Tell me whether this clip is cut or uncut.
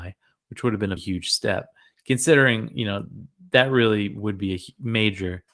cut